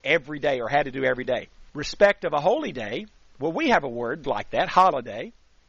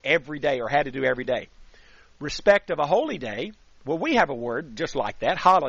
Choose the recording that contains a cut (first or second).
first